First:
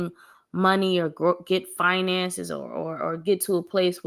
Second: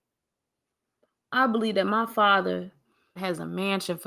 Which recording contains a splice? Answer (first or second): second